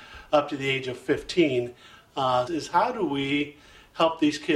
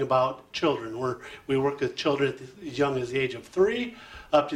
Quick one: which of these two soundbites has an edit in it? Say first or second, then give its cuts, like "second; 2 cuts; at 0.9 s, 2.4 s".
first; 1 cut; at 2.5 s